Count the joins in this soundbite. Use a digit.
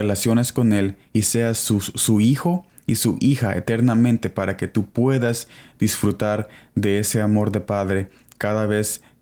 0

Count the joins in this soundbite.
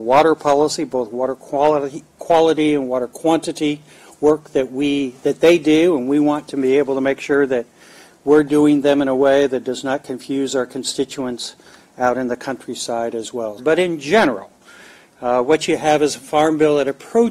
1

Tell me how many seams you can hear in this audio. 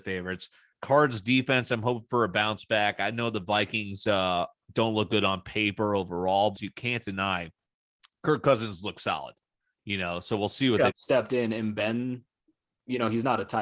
2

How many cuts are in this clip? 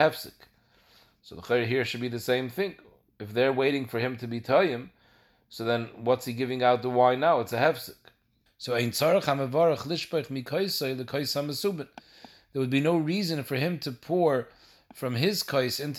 1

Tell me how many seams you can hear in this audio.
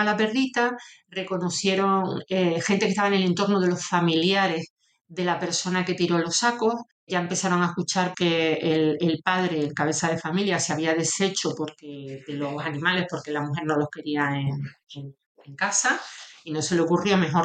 1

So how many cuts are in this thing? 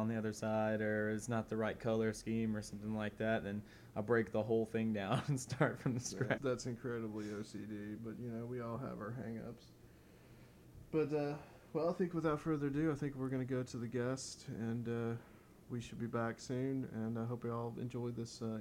1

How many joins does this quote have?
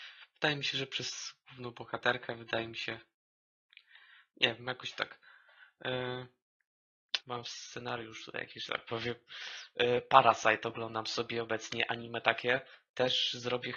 1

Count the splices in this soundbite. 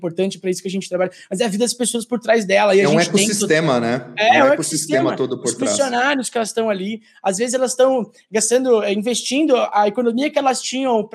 0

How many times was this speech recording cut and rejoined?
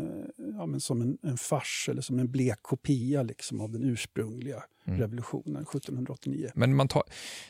1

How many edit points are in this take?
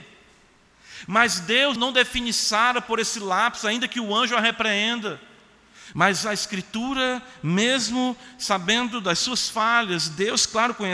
2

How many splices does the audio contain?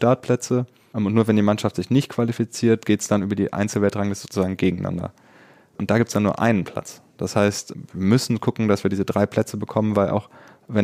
0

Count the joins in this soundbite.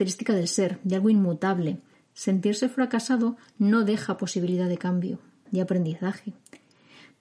2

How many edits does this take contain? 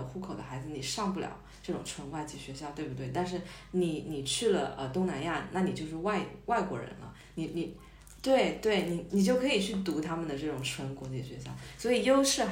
1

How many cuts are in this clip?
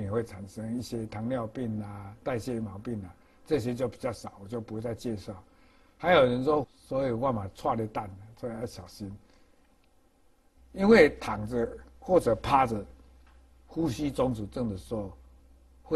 2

